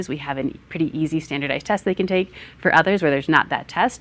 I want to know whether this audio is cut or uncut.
uncut